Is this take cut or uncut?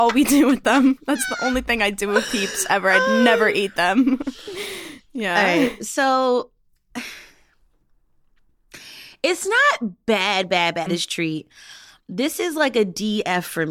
cut